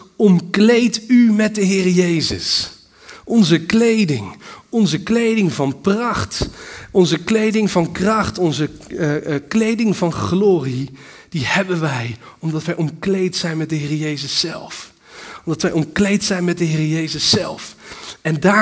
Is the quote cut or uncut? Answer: uncut